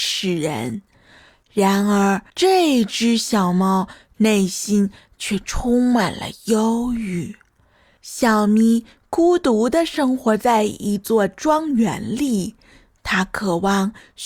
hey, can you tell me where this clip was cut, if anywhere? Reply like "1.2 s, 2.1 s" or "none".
2.3 s

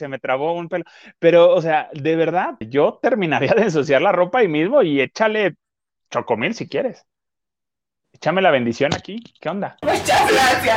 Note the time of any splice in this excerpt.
2.6 s, 9.8 s

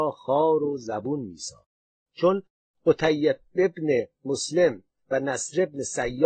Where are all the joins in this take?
2.1 s

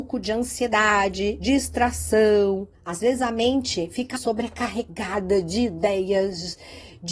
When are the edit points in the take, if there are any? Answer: 2.7 s, 4.2 s

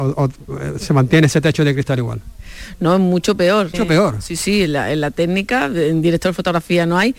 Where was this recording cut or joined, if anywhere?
3.7 s

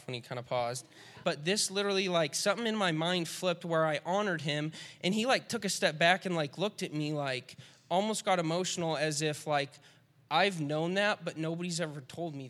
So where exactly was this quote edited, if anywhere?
1.2 s

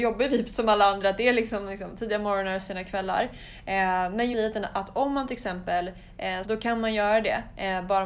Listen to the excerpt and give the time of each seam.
4.3 s, 6.4 s

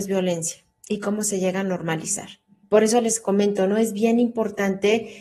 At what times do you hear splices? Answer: 2.6 s

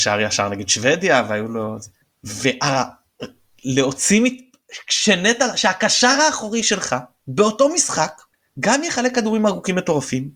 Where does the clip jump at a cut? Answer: none

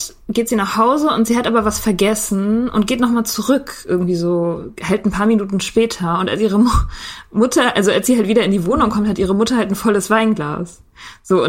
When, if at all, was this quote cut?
none

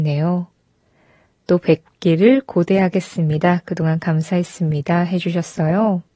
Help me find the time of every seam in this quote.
none

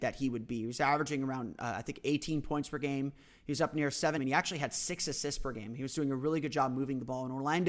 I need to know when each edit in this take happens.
4.2 s

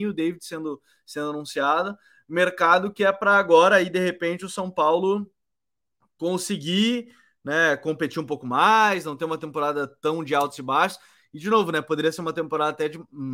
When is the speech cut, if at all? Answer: none

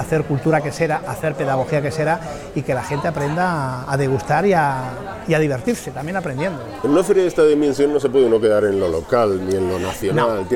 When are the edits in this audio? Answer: none

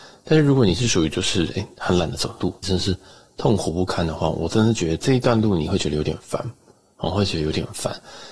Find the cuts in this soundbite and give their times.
2.6 s

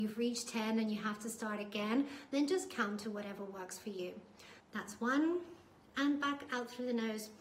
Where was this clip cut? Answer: 4.6 s

